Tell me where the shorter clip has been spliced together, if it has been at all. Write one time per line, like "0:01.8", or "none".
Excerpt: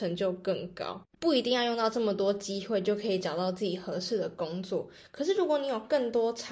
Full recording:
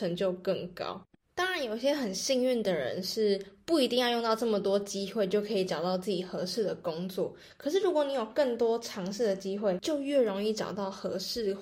0:01.2